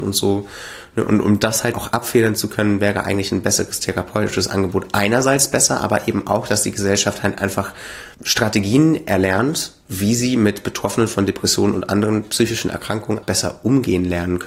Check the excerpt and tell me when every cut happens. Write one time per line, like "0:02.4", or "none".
0:01.7
0:08.1
0:13.2